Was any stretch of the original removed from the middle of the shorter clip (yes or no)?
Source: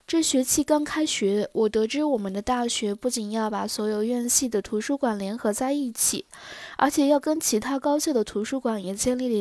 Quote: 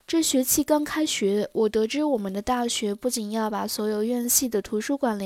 no